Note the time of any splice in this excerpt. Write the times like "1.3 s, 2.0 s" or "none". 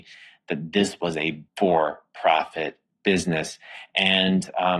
1.5 s